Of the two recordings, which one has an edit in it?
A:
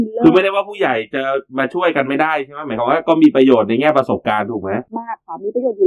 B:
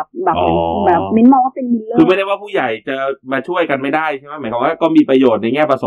A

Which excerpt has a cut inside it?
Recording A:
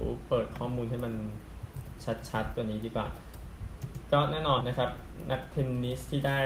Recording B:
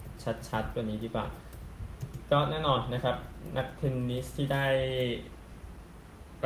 A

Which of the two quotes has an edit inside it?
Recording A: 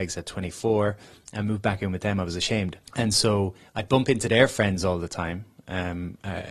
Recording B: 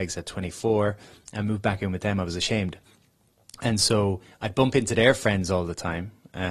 A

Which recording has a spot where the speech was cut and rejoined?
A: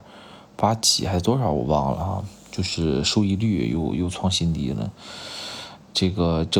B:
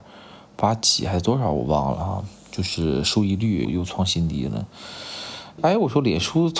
B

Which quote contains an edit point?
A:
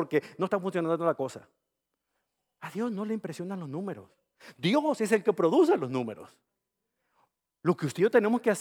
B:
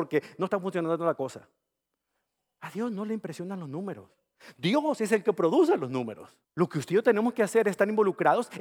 B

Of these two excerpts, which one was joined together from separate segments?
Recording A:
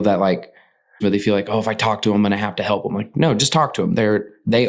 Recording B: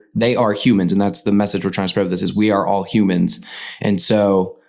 A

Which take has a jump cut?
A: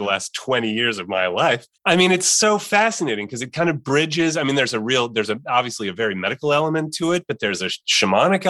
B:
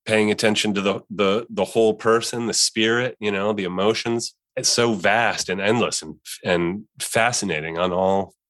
A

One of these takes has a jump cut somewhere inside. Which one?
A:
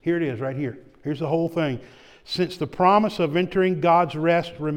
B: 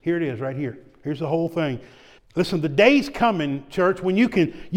B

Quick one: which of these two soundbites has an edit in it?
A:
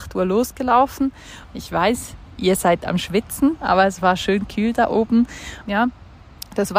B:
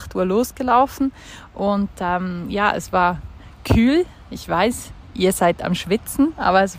A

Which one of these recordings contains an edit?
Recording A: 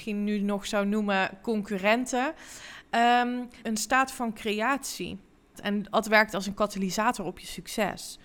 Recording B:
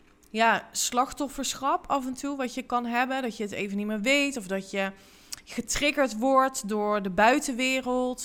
A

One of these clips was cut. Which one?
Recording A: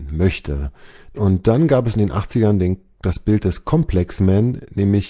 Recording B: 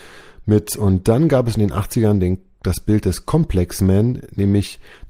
A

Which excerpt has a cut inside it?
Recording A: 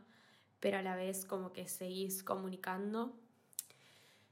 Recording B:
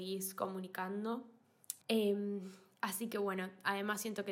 B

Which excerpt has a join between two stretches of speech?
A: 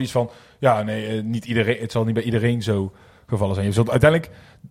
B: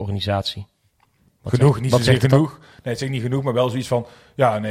B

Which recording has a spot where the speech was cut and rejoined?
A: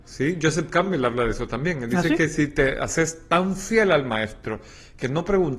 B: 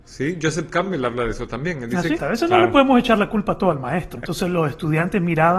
B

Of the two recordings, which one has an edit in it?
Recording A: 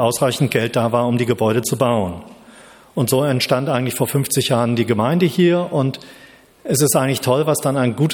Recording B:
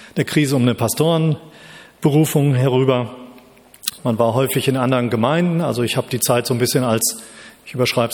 B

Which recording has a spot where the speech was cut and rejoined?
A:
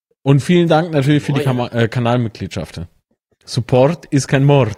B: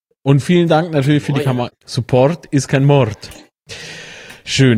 B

